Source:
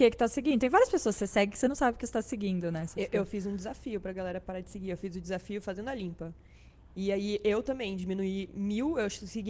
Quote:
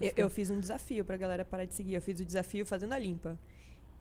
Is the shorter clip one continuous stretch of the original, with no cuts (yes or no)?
yes